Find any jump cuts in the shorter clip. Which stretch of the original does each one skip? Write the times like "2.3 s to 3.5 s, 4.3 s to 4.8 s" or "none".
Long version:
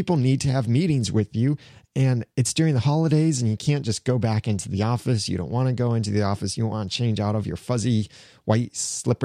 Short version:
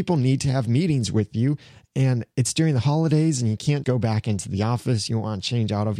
3.8 s to 4.0 s, 5.3 s to 6.6 s